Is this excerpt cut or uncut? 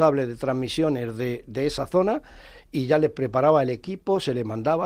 uncut